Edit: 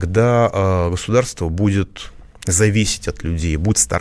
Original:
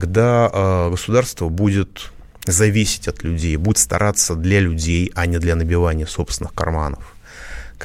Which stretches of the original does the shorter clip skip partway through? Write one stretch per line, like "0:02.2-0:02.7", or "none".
none